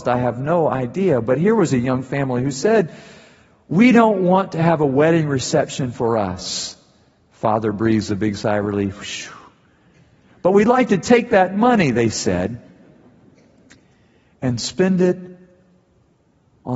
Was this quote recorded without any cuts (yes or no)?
yes